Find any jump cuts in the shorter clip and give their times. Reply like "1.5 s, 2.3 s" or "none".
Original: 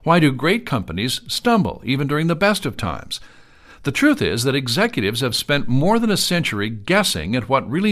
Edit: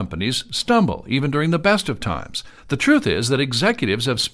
2.6 s